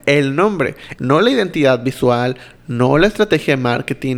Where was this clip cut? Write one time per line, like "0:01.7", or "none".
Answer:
0:01.0
0:02.6